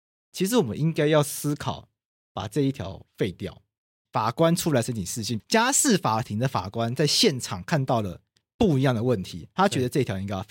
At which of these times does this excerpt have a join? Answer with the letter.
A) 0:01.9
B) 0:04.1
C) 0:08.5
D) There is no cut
B